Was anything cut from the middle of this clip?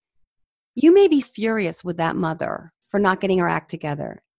yes; 2 cuts; at 1.2 s, 2.8 s

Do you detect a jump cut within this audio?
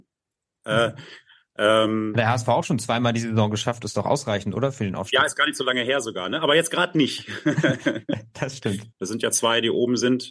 yes; 1 cut; at 8.9 s

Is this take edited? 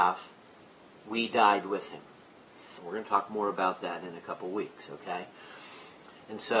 yes; 1 cut; at 2.8 s

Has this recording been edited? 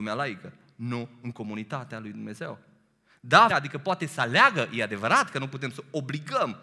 yes; 1 cut; at 3.5 s

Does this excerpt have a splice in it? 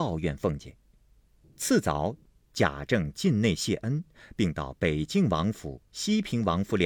yes; 1 cut; at 1.4 s

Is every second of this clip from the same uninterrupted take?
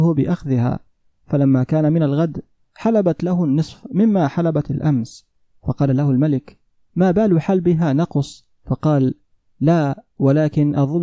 no; 1 cut; at 8.6 s

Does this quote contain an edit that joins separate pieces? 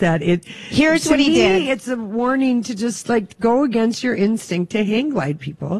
no; 0 cuts

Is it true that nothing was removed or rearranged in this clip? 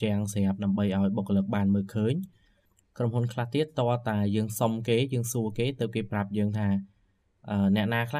yes; 0 cuts

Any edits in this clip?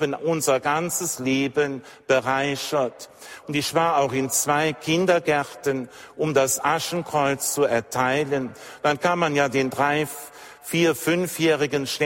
yes; 1 cut; at 3.4 s

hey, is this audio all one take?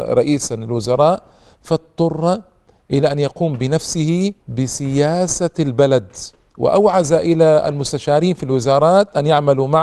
no; 1 cut; at 4.4 s

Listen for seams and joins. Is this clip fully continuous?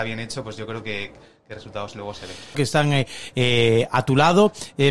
no; 1 cut; at 2.5 s

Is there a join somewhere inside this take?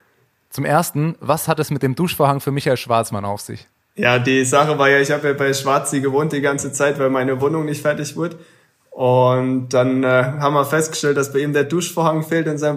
no; 0 cuts

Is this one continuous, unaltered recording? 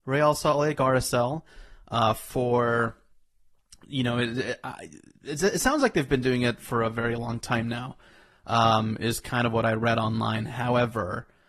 yes; 0 cuts

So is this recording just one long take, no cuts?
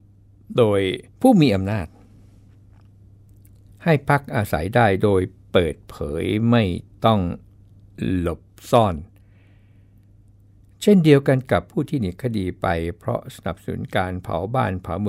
no; 1 cut; at 1.1 s

